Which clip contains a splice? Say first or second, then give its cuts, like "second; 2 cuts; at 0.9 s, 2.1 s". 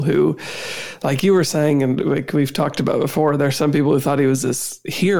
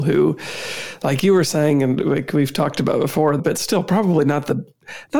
second; 1 cut; at 3.4 s